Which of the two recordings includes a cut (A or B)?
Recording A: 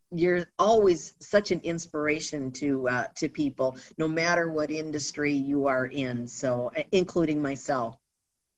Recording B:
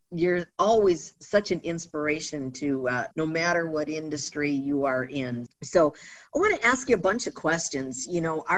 B